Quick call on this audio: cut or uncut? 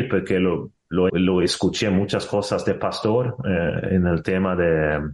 cut